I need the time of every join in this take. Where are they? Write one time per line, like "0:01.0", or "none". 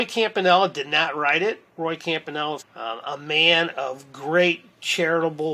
0:02.6

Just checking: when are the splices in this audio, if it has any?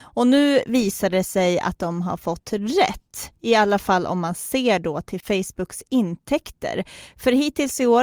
none

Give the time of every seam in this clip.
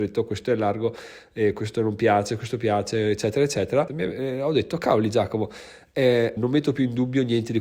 0:03.9
0:06.4

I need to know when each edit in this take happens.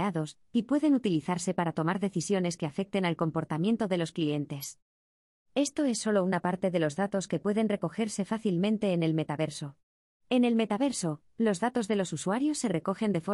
0:10.2

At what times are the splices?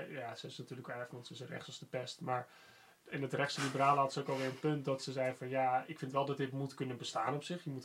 0:01.1

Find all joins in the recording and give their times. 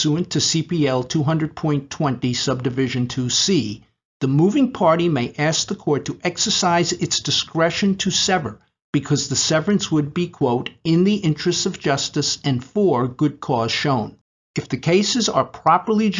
0:04.1

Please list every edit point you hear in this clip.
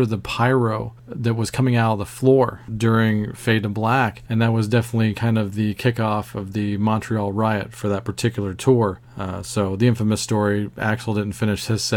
0:02.7

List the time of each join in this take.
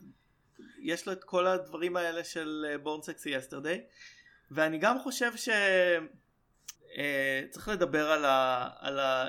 0:06.8

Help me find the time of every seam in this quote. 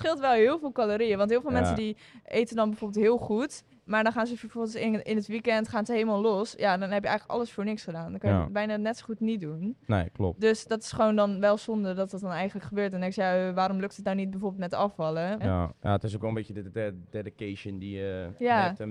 0:15.4

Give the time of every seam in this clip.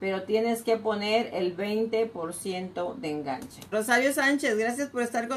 0:03.7

